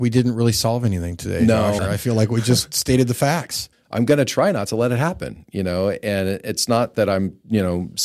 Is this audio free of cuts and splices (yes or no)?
no